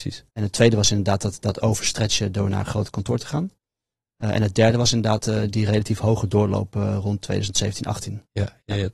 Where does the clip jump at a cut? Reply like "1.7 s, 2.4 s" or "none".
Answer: none